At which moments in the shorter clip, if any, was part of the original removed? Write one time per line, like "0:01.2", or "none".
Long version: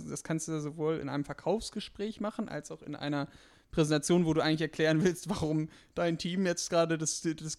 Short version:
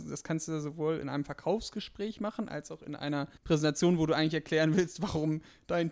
0:03.4